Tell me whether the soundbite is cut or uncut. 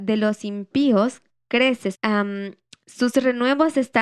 cut